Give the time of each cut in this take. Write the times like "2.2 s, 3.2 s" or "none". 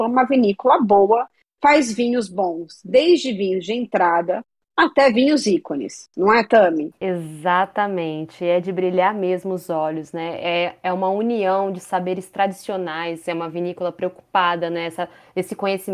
none